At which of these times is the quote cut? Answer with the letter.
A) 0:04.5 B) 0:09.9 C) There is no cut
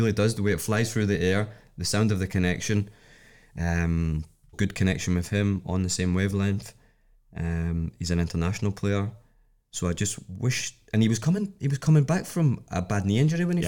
A